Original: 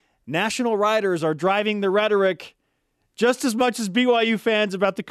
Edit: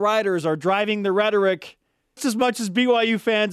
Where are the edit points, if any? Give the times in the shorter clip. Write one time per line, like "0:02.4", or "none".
0:02.2